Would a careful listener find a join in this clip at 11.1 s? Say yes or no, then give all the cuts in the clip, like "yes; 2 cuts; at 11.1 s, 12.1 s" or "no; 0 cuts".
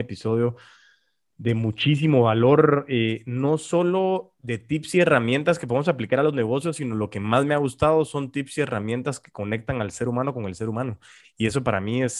no; 0 cuts